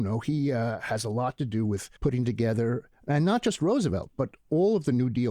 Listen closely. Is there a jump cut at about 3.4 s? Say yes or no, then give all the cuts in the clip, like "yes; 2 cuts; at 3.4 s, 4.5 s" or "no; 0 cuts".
no; 1 cut; at 2.0 s